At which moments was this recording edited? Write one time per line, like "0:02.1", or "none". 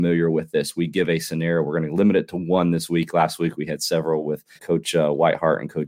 0:04.6